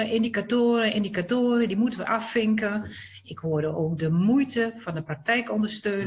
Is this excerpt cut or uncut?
uncut